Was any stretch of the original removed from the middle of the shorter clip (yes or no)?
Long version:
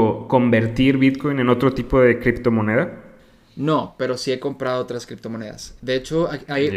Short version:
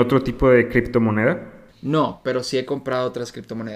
yes